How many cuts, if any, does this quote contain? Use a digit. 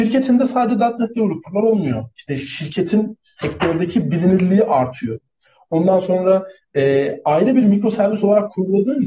1